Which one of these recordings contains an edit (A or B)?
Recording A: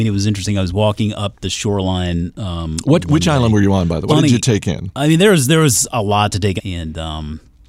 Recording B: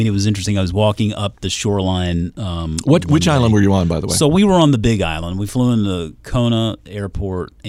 A